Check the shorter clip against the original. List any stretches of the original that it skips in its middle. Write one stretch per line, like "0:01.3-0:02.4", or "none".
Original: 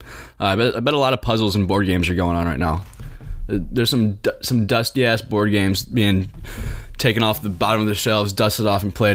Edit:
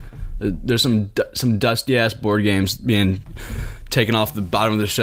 none

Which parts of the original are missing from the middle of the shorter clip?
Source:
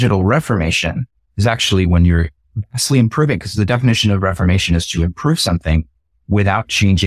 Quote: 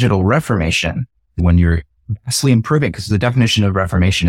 0:01.4-0:01.9

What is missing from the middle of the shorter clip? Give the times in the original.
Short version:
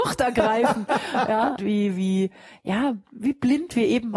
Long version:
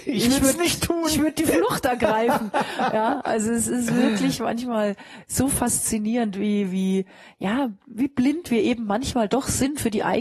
0:03.2-0:06.3

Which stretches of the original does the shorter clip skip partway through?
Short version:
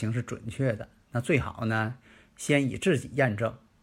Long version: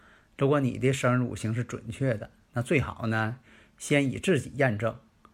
none

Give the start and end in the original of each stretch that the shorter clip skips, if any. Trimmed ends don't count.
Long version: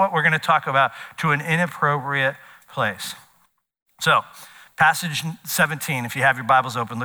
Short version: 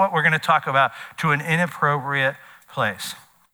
none

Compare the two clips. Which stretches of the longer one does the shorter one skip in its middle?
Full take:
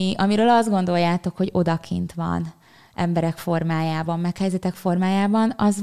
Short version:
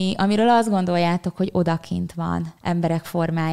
0:02.6-0:02.9

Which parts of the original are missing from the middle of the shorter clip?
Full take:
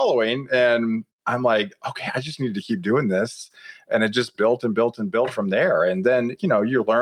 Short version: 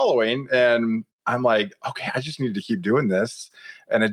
none

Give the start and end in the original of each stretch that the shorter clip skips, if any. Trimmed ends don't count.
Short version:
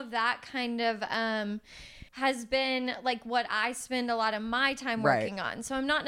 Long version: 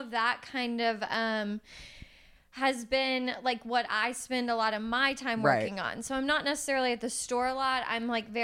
0:02.1-0:02.5

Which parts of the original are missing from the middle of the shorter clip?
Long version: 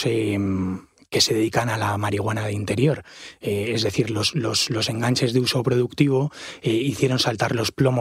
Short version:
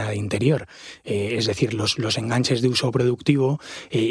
0:04.3-0:04.7

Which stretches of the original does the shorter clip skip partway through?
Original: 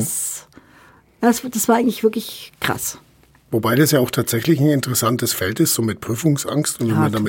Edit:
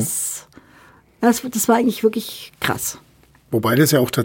none

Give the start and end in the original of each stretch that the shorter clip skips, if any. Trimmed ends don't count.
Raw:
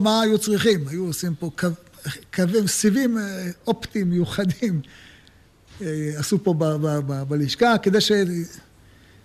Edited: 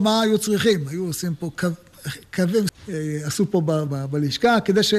0:02.7-0:05.6
0:06.8-0:07.0

